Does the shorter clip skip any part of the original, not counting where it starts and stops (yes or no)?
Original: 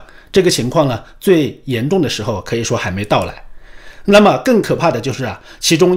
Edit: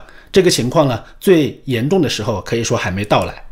no